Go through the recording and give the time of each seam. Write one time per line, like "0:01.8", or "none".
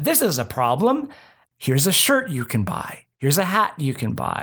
0:01.5